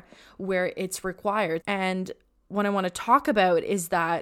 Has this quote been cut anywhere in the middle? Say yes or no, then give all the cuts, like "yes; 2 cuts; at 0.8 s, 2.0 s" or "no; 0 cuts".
yes; 1 cut; at 1.6 s